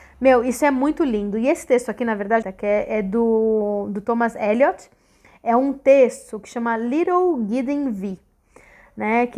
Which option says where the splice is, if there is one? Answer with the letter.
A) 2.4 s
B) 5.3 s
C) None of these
A